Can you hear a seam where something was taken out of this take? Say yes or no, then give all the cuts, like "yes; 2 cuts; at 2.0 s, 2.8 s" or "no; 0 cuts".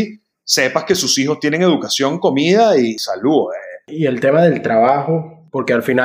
yes; 1 cut; at 3.8 s